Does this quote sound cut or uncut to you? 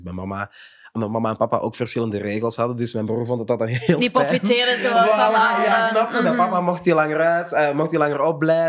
uncut